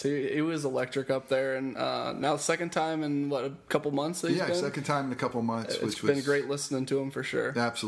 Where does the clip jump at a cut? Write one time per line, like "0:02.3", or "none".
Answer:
none